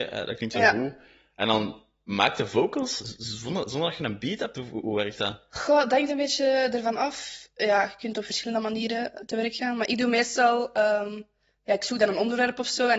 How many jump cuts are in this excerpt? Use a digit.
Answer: 0